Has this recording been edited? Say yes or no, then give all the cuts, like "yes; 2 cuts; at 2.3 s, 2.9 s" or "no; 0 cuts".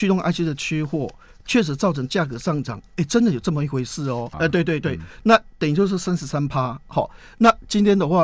yes; 1 cut; at 4.3 s